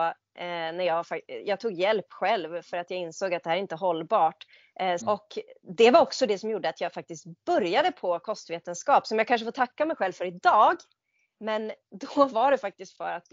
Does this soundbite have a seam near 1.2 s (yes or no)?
no